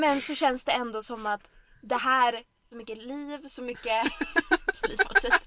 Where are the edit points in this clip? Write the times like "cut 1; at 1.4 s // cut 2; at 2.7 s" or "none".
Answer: cut 1; at 2.7 s